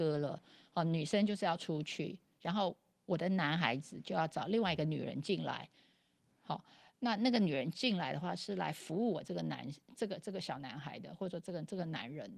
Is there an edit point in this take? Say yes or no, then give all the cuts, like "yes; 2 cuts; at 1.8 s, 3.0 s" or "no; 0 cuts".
no; 0 cuts